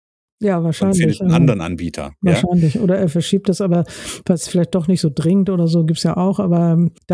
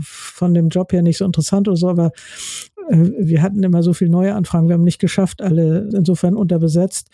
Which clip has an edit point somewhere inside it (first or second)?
second